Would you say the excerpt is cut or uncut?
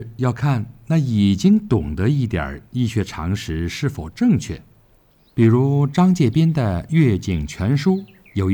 cut